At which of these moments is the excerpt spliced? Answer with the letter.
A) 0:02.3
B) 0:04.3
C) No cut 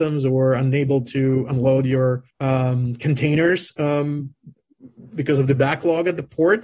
A